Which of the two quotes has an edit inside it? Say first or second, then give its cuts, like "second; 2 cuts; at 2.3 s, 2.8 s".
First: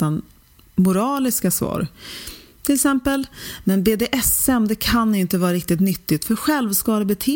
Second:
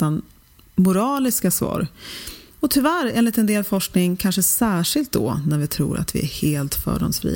second; 1 cut; at 2.5 s